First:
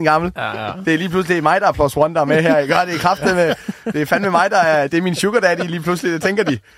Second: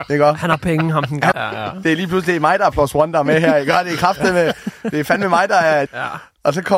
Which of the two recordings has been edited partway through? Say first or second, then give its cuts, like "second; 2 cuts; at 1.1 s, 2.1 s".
second; 2 cuts; at 1.3 s, 5.9 s